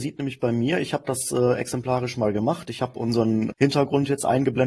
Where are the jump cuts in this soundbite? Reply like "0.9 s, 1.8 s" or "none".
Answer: 3.5 s